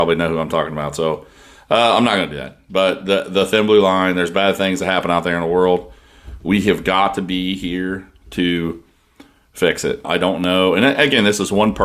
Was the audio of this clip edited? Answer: yes; 1 cut; at 10.0 s

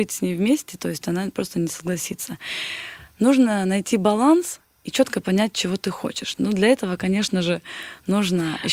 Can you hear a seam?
no; 0 cuts

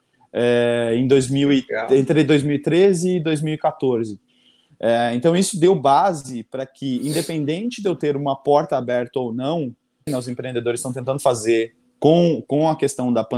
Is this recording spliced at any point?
yes; 1 cut; at 10.1 s

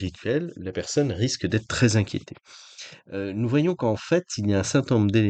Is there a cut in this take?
no; 0 cuts

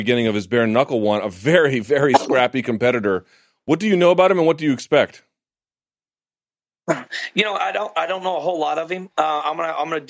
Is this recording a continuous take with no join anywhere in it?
yes; 0 cuts

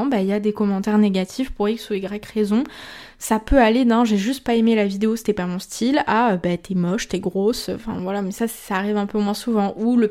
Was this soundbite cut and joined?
no; 0 cuts

